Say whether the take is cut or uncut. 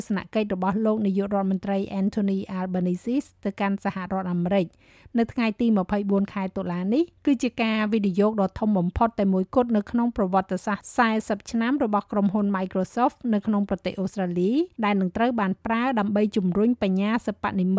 cut